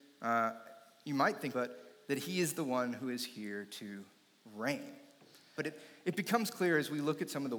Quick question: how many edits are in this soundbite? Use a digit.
2